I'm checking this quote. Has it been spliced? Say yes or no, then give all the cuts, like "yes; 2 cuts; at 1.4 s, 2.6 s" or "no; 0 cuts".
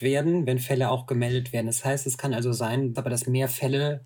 yes; 1 cut; at 3.0 s